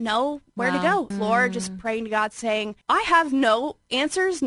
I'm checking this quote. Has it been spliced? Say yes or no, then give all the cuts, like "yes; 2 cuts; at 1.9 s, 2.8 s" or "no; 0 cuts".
yes; 2 cuts; at 1.1 s, 2.8 s